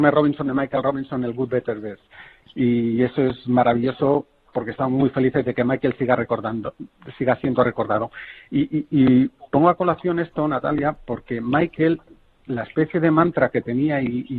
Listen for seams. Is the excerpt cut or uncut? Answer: uncut